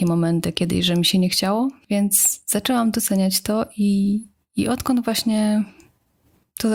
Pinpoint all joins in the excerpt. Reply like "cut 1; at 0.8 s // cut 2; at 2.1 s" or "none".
none